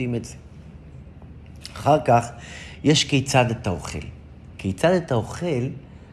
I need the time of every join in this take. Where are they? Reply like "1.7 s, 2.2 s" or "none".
none